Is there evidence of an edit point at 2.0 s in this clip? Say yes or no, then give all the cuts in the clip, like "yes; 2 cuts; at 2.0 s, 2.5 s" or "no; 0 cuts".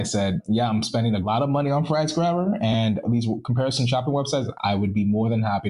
no; 1 cut; at 4.5 s